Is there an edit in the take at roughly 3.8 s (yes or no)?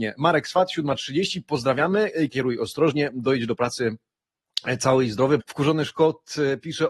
no